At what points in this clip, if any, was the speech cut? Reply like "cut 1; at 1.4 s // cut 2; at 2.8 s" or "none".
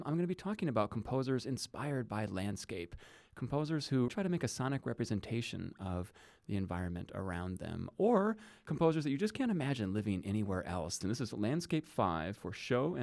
cut 1; at 4.1 s // cut 2; at 11.0 s